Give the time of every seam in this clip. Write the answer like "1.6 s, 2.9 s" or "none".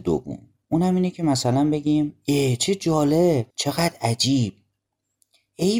3.5 s